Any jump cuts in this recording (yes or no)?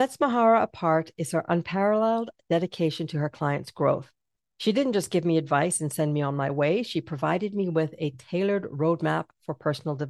no